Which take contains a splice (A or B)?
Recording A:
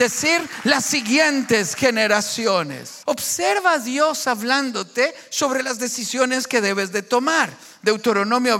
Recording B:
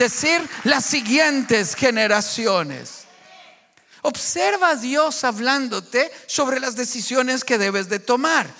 A